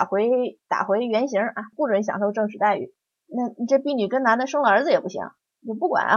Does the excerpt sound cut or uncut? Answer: cut